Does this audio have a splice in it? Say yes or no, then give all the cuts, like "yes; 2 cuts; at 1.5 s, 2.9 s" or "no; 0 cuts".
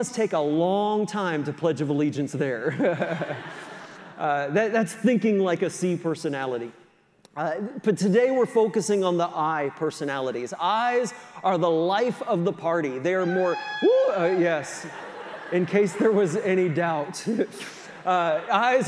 no; 0 cuts